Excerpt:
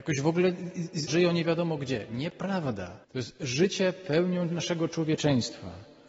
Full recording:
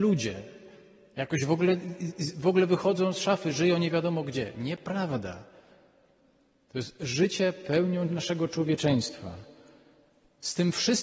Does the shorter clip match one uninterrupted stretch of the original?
no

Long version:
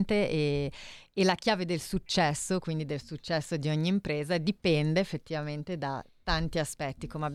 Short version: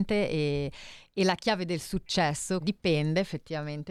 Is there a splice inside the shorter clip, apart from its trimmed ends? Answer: yes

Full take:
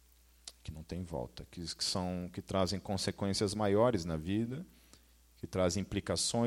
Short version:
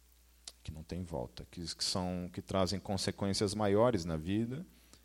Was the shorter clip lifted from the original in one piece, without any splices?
yes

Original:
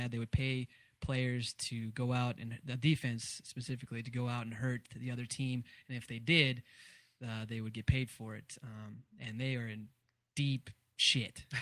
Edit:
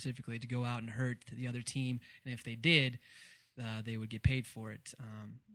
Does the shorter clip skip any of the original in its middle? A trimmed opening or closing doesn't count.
no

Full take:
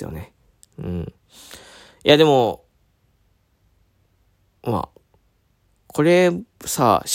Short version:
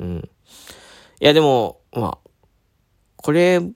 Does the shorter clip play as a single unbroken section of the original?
no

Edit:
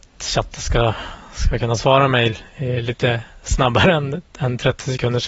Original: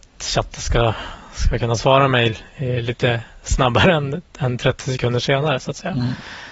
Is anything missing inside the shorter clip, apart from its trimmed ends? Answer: no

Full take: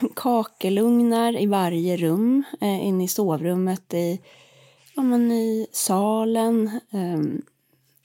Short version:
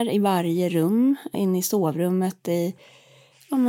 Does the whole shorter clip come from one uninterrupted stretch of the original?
no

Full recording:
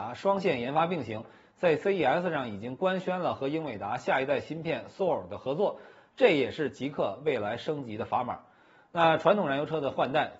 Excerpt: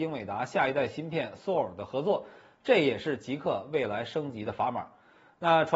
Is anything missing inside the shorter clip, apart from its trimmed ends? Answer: no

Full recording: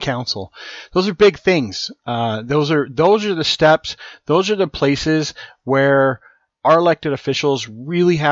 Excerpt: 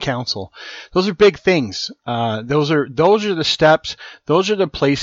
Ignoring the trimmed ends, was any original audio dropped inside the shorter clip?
no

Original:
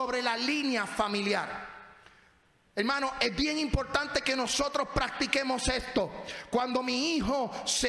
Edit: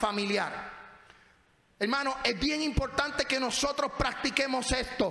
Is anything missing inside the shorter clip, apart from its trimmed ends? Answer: no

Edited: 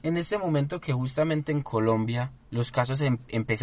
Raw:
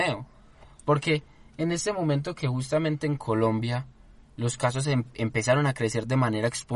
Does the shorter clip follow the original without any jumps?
no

